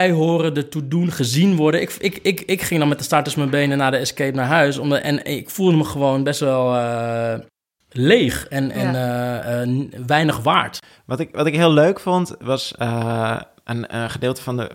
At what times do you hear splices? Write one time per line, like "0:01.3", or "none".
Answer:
none

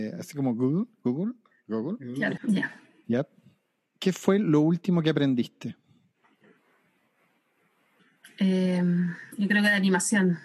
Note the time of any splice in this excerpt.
0:02.4

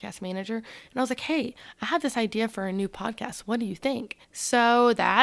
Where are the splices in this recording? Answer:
0:04.2

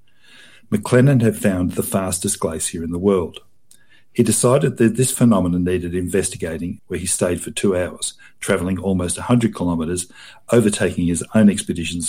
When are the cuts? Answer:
0:06.8

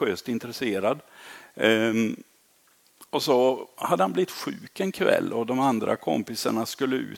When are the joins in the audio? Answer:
none

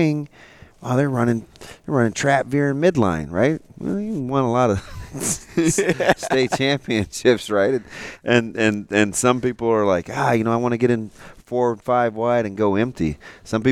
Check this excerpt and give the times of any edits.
none

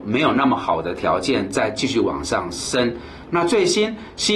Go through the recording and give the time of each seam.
0:03.3

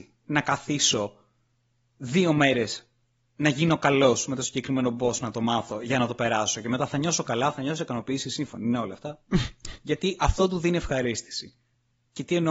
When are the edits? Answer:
0:09.3

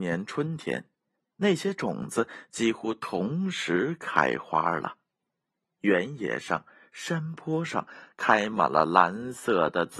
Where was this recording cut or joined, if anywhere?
none

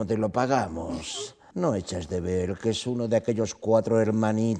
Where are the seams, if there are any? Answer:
0:01.5

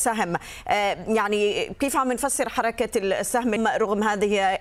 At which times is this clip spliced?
0:03.6

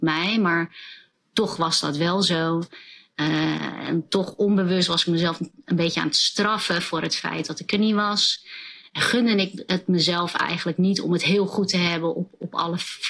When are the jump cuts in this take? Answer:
none

